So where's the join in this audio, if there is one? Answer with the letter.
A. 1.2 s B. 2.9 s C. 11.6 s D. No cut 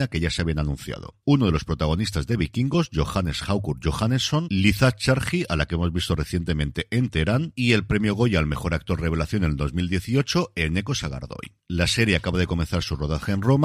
A